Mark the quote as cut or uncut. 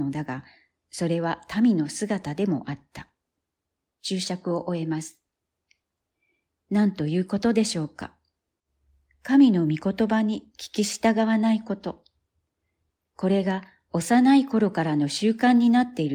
uncut